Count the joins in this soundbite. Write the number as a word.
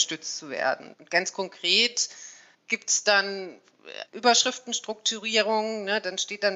three